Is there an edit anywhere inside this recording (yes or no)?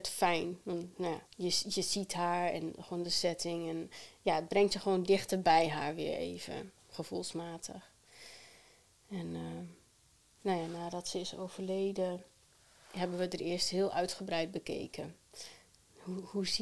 yes